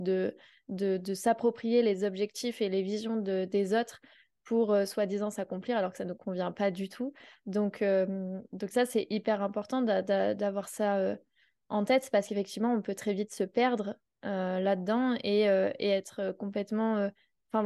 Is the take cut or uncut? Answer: uncut